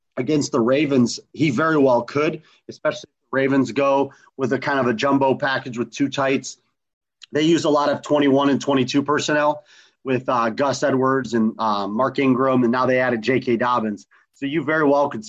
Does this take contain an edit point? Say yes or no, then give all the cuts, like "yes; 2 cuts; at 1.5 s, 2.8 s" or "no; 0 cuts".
no; 0 cuts